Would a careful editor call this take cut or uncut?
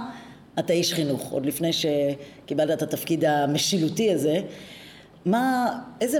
uncut